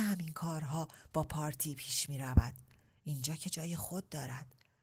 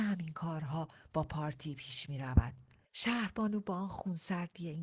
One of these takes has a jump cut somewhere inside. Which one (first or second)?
second